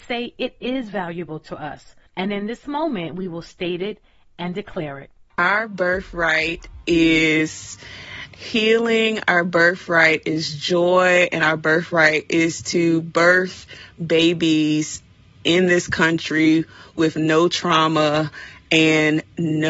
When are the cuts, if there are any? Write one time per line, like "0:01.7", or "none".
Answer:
0:02.1